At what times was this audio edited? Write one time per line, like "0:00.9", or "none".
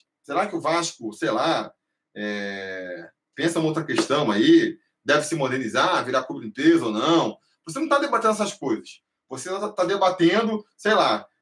none

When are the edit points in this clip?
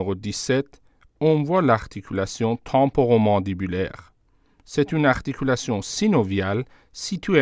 none

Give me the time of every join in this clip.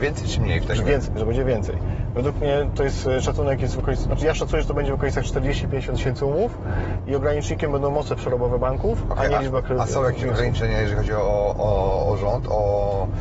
none

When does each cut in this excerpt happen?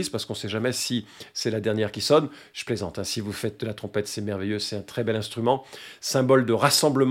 none

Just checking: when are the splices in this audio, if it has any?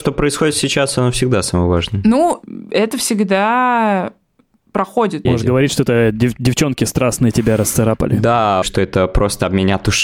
0:05.3
0:08.6

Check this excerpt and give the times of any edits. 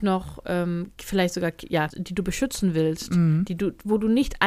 0:01.9

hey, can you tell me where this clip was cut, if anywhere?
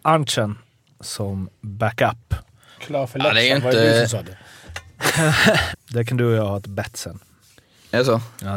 0:02.8
0:05.7

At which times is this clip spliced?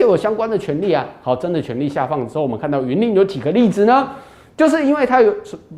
none

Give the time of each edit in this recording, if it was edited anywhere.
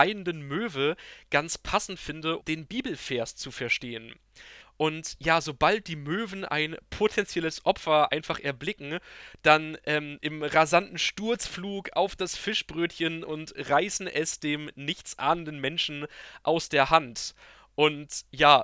0:02.4
0:04.6
0:10.2

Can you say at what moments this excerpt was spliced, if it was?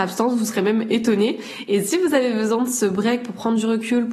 none

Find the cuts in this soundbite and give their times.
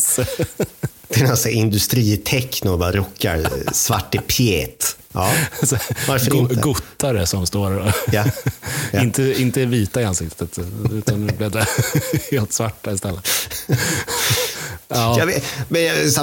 0:01.0

